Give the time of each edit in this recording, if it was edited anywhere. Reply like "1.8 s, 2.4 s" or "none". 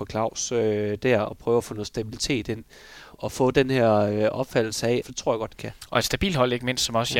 3.1 s, 5.0 s